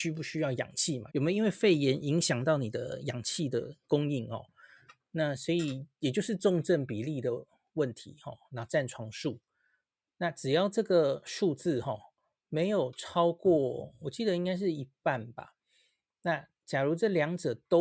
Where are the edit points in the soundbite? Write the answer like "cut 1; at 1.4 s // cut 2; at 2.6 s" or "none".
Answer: cut 1; at 1.1 s